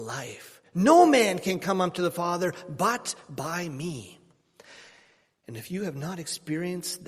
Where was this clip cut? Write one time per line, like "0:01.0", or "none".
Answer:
none